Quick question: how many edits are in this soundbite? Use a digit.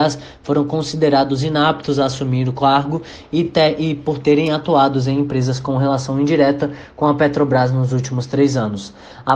0